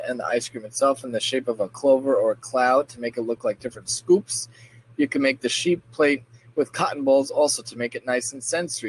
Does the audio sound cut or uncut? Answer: uncut